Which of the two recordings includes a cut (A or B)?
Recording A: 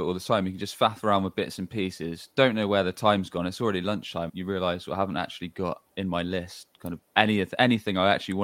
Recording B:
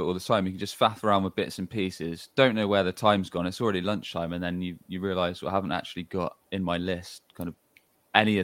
A